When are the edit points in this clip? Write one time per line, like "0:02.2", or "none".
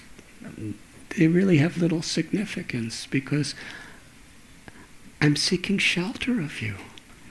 0:01.8
0:05.1